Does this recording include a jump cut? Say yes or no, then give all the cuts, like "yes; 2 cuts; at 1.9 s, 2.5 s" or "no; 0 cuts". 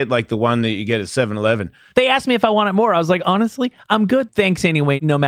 yes; 2 cuts; at 1.9 s, 4.3 s